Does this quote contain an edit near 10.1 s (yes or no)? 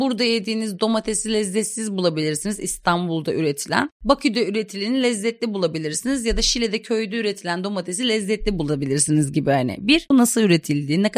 yes